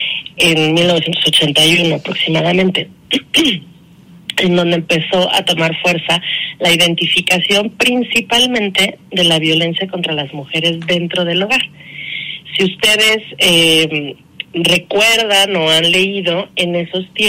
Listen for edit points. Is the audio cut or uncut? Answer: cut